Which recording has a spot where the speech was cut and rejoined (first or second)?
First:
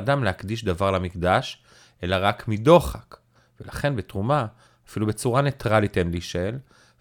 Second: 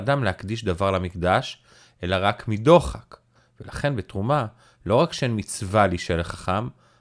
first